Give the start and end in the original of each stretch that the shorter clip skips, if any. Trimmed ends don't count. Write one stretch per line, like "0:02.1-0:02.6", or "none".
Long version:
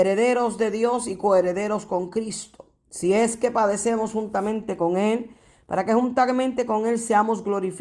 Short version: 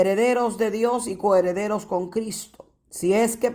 none